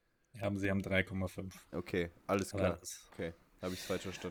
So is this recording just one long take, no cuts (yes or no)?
no